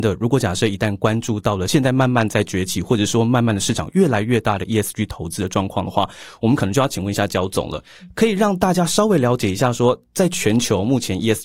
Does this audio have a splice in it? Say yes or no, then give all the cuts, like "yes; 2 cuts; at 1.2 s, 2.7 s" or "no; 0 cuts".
no; 0 cuts